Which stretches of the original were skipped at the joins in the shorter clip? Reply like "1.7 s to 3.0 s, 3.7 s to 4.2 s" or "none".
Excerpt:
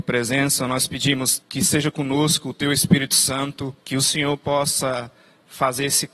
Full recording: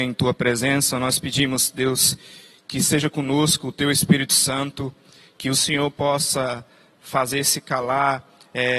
1.7 s to 2.6 s, 5.0 s to 5.3 s